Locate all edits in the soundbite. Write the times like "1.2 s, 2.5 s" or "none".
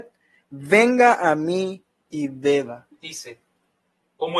2.9 s